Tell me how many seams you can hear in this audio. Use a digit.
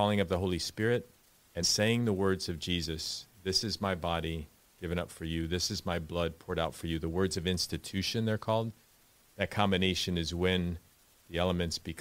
1